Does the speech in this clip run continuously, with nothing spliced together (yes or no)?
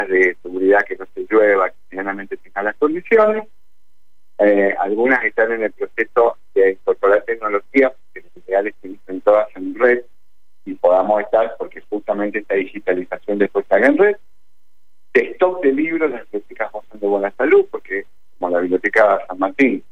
yes